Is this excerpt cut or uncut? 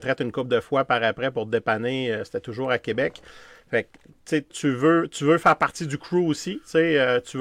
cut